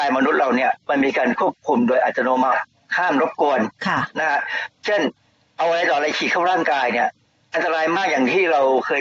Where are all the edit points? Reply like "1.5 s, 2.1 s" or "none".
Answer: none